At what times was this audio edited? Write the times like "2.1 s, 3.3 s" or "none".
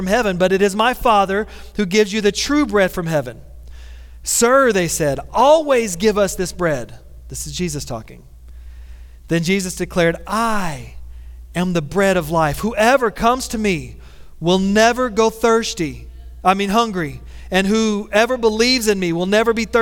none